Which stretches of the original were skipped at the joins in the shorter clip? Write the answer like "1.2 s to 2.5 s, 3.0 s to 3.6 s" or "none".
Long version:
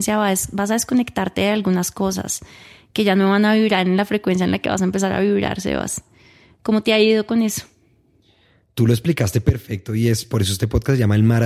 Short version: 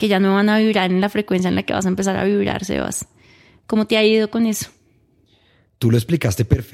none